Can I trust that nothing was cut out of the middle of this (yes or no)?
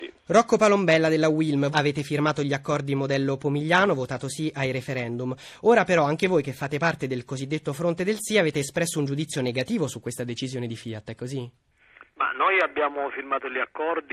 no